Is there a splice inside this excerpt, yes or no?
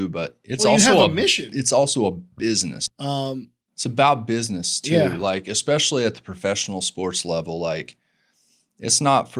yes